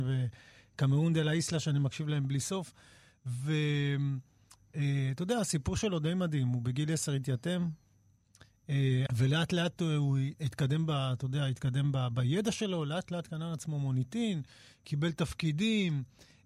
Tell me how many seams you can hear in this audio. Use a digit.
1